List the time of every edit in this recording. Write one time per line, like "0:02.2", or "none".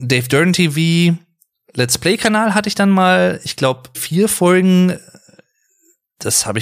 0:03.9